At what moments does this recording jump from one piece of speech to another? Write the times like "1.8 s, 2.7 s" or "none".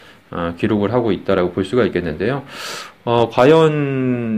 none